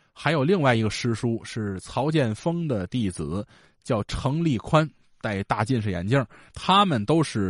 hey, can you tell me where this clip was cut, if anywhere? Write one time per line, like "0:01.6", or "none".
0:06.5